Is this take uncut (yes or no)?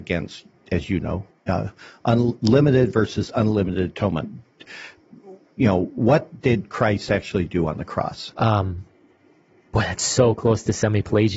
no